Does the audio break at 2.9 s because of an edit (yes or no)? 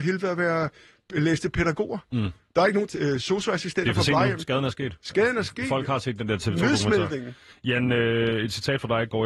yes